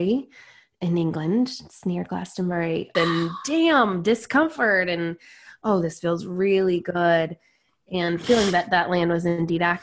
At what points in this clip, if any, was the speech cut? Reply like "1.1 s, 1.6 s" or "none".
2.9 s